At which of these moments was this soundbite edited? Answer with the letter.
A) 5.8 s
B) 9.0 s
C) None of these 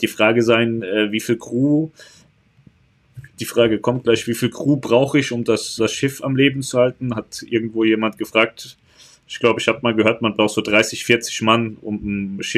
A